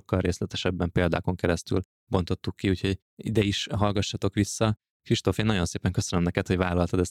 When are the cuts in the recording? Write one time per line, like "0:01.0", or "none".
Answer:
none